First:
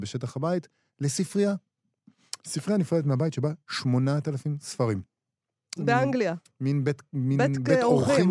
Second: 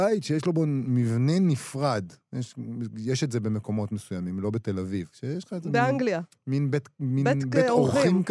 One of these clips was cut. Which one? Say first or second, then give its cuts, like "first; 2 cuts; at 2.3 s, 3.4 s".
first; 1 cut; at 5.8 s